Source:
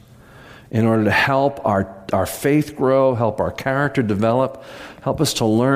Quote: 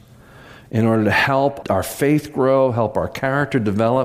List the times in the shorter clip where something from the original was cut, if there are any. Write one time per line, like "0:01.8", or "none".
0:01.6